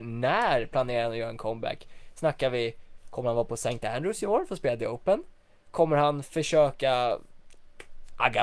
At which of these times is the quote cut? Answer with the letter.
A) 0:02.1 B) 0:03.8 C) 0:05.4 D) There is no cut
D